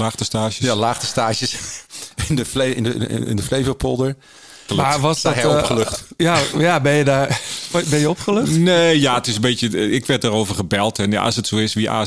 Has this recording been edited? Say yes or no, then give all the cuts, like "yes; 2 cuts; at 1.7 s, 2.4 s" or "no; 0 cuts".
yes; 1 cut; at 4.7 s